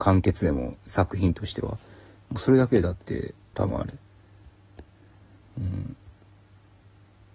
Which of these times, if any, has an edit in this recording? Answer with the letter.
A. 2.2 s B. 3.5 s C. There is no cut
B